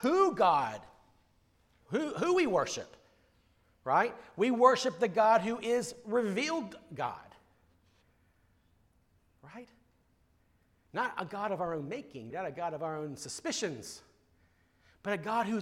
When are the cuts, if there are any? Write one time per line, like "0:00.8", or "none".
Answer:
0:12.3